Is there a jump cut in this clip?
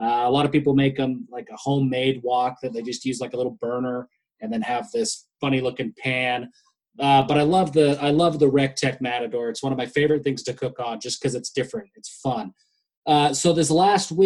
no; 0 cuts

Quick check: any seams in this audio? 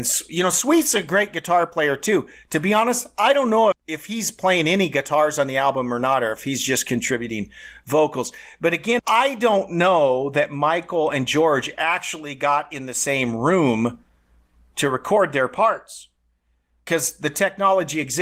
yes; 2 cuts; at 3.7 s, 9.0 s

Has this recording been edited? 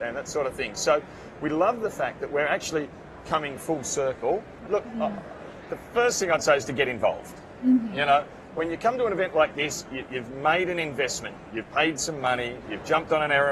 yes; 1 cut; at 4.7 s

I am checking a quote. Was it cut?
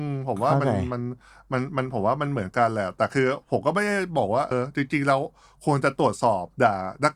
yes; 1 cut; at 4.5 s

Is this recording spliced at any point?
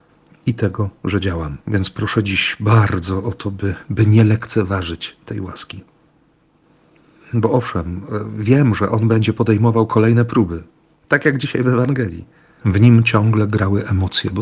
yes; 2 cuts; at 1.6 s, 12.6 s

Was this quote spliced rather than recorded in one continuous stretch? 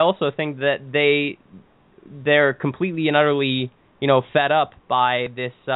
no; 0 cuts

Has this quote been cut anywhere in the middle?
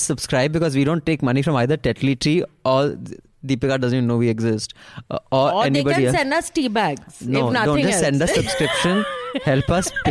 no; 0 cuts

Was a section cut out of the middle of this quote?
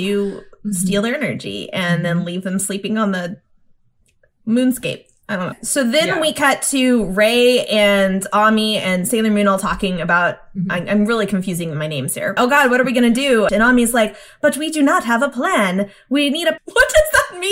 yes; 3 cuts; at 12.4 s, 13.5 s, 16.6 s

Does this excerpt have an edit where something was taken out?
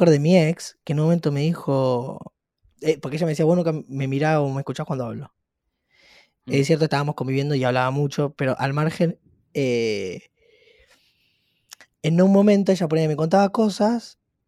no; 0 cuts

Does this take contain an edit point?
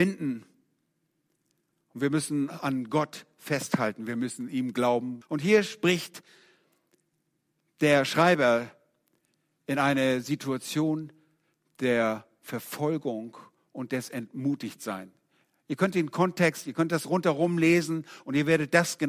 yes; 1 cut; at 5.2 s

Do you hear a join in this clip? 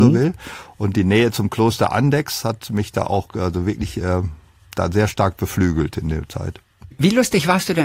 no; 0 cuts

